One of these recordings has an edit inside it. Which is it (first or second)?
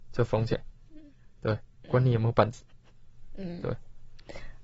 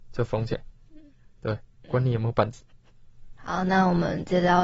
second